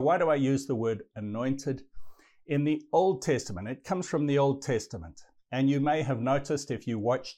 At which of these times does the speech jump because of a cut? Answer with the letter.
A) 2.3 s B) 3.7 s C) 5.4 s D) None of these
D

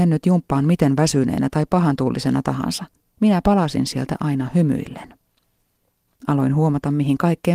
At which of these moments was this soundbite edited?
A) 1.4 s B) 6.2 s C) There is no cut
B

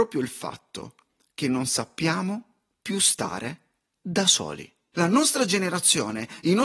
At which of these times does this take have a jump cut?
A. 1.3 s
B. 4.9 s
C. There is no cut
B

